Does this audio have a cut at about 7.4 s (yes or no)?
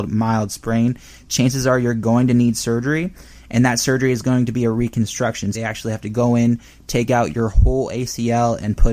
no